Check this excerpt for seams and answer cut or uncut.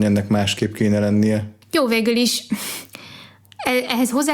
cut